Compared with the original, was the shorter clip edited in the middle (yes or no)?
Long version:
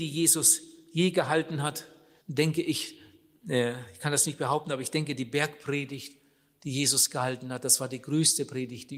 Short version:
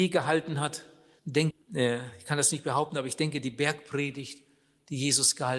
yes